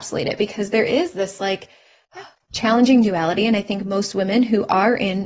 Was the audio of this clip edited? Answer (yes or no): no